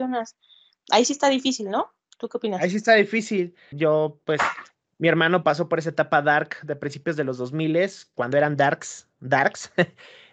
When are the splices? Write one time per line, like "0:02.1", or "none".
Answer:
0:03.7